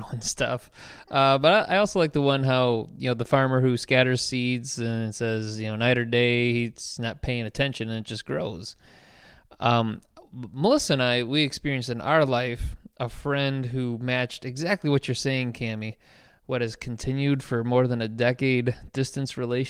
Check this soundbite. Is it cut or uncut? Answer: cut